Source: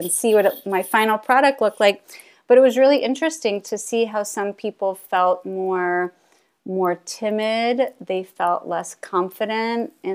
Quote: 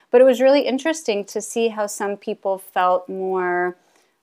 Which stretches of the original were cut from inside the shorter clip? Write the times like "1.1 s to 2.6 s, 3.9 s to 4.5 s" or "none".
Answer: none